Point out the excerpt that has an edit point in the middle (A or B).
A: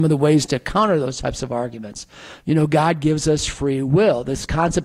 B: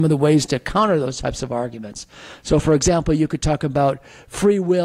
A